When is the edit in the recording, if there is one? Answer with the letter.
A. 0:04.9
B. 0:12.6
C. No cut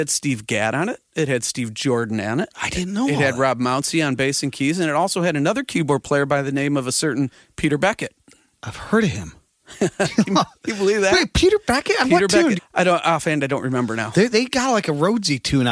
B